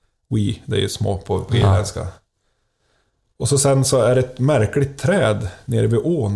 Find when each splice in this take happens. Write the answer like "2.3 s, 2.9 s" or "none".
none